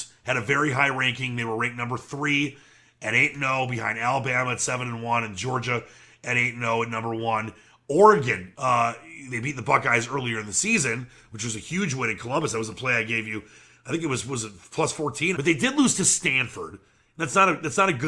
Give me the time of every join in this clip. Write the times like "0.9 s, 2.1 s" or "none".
8.5 s, 15.3 s